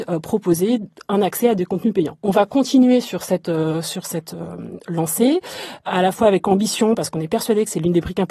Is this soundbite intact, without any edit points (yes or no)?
yes